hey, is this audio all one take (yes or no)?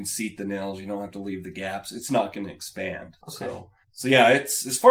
no